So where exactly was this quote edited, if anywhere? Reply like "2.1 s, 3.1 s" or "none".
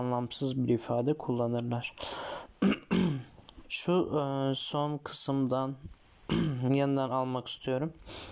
3.6 s